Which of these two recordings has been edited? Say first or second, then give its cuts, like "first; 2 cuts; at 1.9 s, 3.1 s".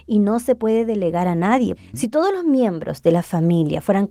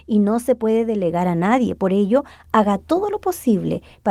first; 1 cut; at 1.8 s